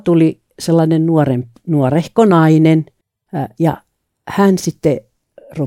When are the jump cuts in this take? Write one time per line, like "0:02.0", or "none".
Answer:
none